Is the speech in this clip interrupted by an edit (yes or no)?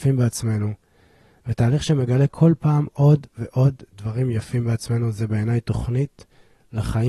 no